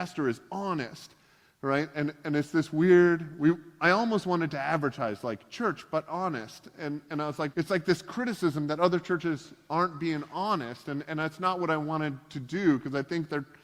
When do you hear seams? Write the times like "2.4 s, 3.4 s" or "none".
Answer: 7.5 s